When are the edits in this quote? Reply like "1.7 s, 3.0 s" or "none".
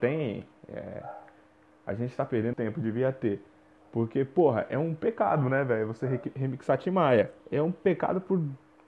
2.5 s, 7.4 s